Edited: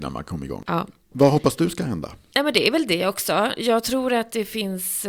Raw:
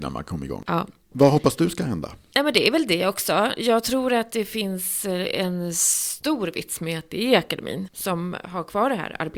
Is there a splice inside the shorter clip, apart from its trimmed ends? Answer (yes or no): no